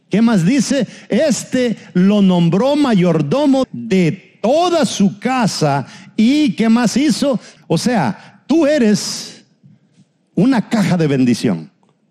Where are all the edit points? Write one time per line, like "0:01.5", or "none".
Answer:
0:03.6
0:07.6